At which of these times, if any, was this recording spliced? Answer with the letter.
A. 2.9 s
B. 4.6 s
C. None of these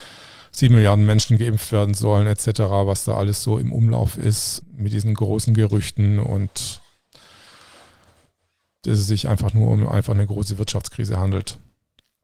B